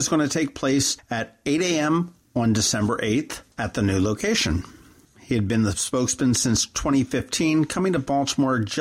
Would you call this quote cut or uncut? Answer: cut